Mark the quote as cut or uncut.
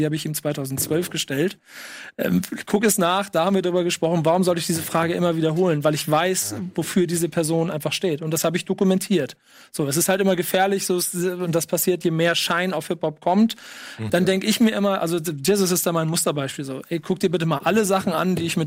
cut